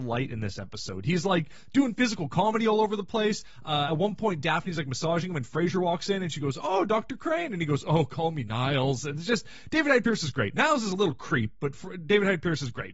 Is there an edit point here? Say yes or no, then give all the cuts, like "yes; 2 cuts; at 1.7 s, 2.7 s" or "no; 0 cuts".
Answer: no; 0 cuts